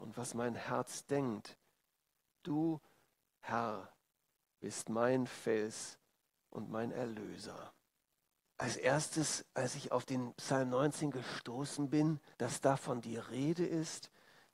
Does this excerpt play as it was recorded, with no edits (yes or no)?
no